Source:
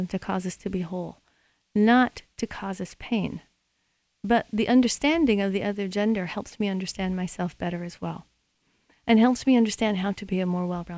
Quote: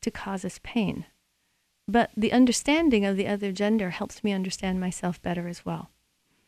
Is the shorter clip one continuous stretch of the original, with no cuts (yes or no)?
yes